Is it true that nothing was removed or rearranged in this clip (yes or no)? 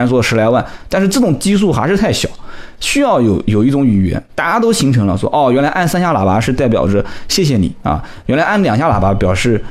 yes